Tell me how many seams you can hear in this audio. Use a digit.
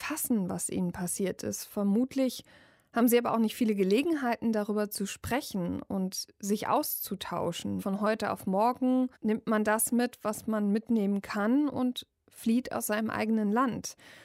2